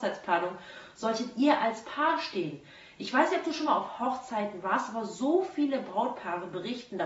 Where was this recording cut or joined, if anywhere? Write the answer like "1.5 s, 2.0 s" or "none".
none